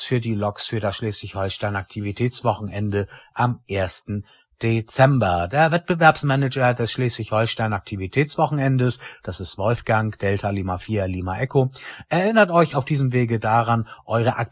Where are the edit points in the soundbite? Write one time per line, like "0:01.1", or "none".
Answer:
none